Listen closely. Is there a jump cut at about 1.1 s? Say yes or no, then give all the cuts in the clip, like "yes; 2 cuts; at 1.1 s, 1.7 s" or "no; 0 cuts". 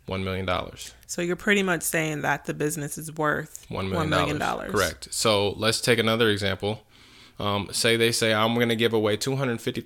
no; 0 cuts